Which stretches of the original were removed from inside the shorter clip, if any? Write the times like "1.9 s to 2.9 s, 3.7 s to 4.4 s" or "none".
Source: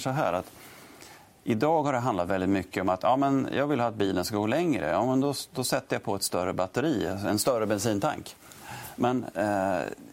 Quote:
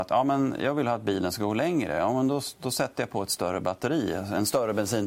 none

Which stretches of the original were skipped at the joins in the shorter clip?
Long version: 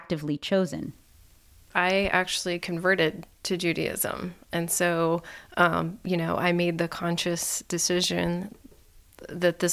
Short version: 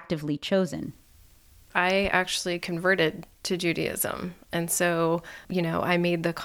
5.4 s to 6.0 s

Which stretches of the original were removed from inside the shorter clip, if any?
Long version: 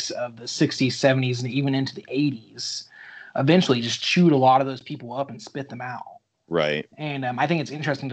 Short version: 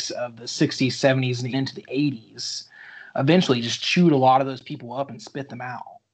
1.5 s to 1.7 s

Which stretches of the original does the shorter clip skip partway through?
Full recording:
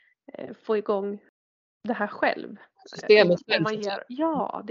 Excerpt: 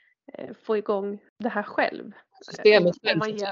1.3 s to 1.7 s

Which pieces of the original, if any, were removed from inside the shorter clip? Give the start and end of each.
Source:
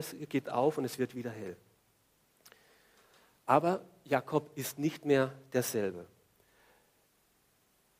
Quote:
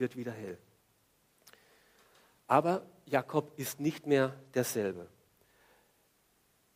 none

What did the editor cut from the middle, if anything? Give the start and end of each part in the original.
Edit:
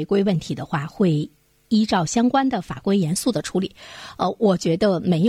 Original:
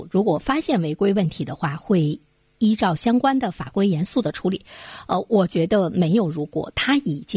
none

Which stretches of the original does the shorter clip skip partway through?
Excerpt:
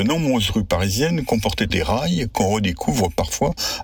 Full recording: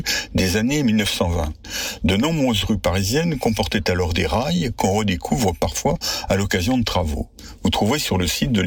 3.8 s to 4.1 s

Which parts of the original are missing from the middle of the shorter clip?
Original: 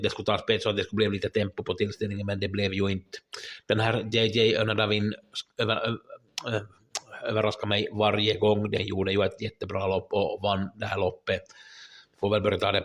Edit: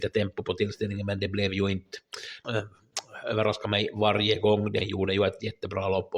3.6 s to 6.4 s

